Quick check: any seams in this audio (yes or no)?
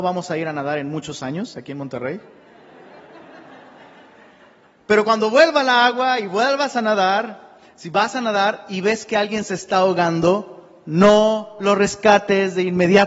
no